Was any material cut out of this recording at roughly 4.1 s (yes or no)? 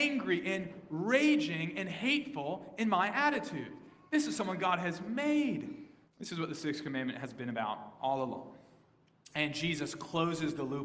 no